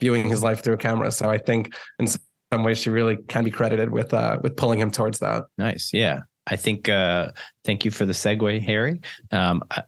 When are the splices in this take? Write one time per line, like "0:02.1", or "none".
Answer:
0:05.5